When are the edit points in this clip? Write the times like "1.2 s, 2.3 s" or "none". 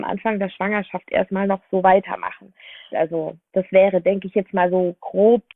2.9 s